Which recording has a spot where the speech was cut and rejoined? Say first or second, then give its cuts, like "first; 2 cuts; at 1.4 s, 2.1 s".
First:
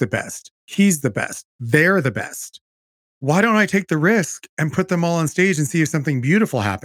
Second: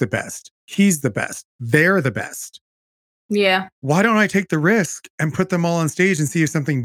first; 1 cut; at 3.1 s